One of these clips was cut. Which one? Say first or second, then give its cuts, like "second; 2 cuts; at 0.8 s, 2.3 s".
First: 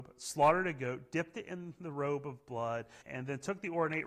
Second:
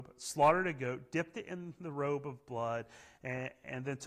first; 1 cut; at 3.0 s